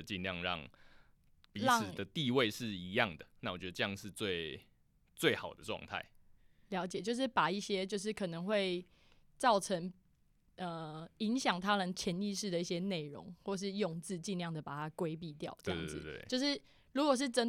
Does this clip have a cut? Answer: no; 0 cuts

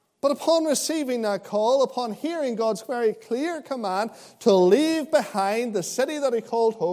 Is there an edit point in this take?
no; 0 cuts

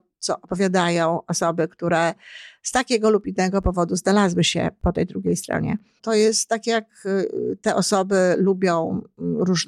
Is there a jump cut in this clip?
yes; 1 cut; at 6.0 s

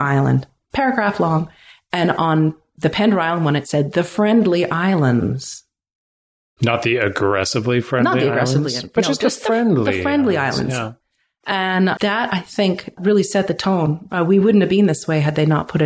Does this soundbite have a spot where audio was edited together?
no; 0 cuts

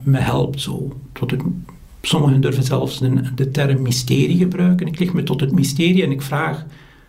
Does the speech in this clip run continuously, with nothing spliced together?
yes; 0 cuts

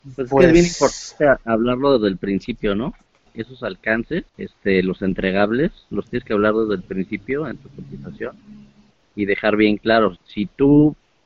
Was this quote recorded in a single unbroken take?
no; 2 cuts; at 4.3 s, 10.2 s

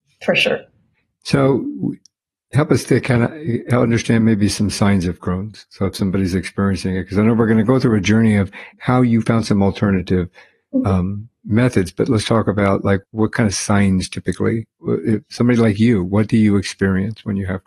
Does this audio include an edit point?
yes; 1 cut; at 13.0 s

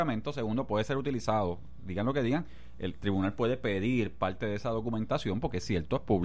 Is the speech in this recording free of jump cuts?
yes; 0 cuts

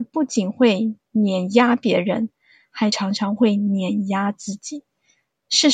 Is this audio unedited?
yes; 0 cuts

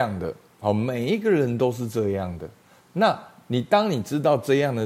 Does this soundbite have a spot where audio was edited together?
no; 0 cuts

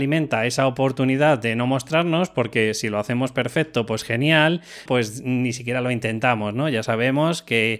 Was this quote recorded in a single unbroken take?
no; 1 cut; at 4.9 s

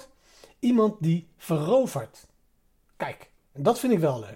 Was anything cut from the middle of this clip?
no; 0 cuts

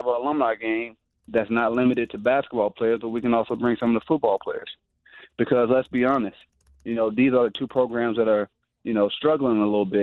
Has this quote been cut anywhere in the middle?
no; 0 cuts

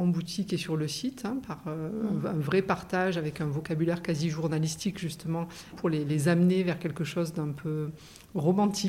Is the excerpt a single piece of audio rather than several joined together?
no; 1 cut; at 5.7 s

